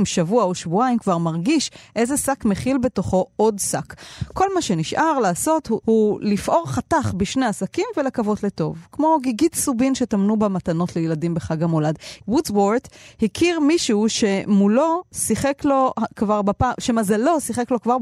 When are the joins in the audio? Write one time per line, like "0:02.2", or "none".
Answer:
0:05.8
0:12.2